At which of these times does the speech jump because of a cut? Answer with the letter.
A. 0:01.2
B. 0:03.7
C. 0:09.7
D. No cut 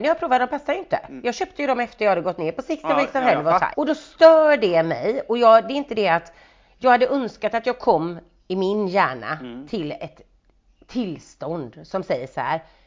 B